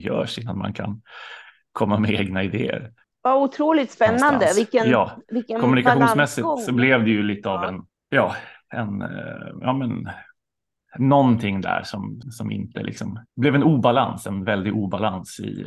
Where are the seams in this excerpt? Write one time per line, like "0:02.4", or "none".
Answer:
0:12.2
0:13.3